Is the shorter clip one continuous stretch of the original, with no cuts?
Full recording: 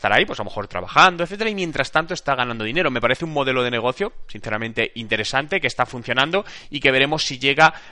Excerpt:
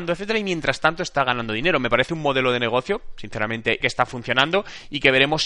no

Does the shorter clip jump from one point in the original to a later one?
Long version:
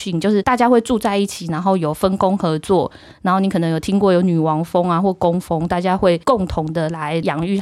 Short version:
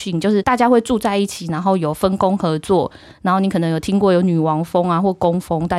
no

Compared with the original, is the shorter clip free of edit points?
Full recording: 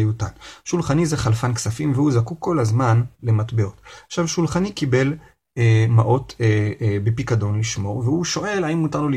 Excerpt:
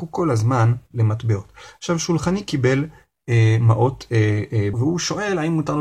no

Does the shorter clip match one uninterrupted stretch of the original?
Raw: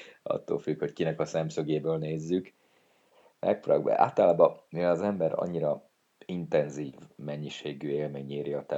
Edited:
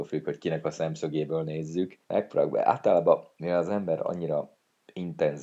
no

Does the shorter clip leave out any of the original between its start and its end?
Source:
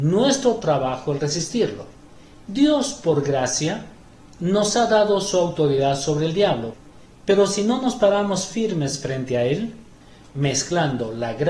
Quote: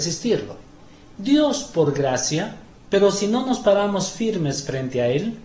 yes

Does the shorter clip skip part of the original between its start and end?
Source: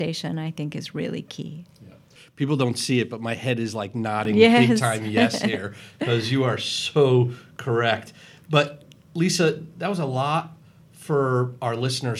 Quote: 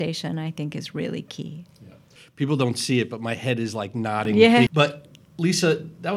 yes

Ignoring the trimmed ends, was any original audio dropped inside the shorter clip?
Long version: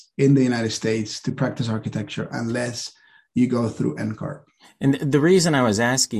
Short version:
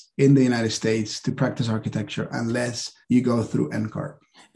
yes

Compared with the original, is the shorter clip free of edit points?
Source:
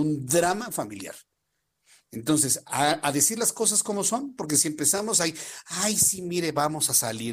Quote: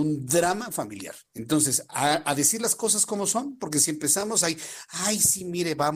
no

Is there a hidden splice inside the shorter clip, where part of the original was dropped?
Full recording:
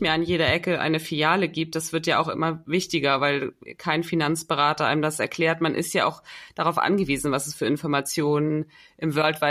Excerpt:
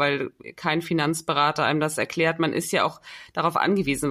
no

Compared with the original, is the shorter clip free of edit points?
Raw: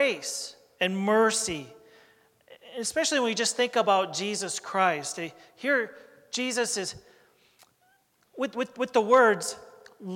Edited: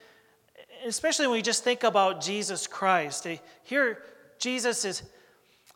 yes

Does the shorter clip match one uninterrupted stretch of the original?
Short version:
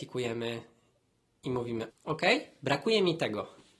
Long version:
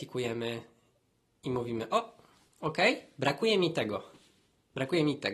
no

